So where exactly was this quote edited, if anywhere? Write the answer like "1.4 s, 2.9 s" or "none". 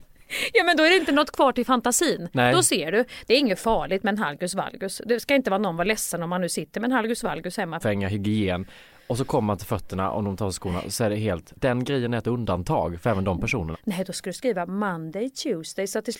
7.8 s, 13.7 s